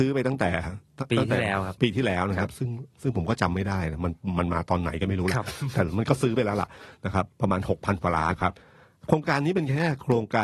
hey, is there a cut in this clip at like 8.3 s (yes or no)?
yes